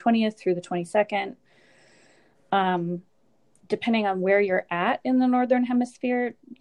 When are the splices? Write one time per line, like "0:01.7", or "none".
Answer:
none